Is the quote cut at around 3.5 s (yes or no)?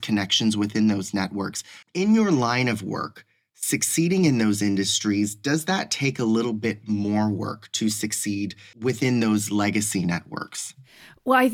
no